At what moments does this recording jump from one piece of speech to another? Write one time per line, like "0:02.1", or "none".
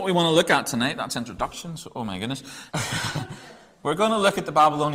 0:02.7